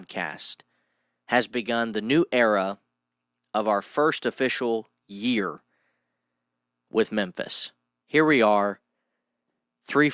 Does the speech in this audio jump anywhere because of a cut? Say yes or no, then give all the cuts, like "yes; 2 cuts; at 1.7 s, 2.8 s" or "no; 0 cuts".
yes; 1 cut; at 8.0 s